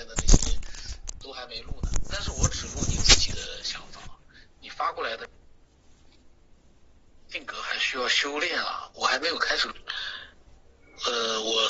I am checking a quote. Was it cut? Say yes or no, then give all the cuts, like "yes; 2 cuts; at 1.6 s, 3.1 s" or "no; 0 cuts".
no; 0 cuts